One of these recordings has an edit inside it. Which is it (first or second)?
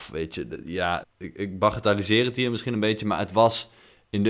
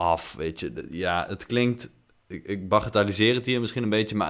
first